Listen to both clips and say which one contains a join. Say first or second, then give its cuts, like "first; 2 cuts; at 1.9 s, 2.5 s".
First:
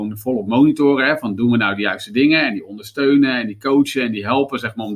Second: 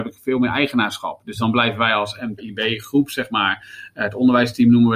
second; 1 cut; at 2.4 s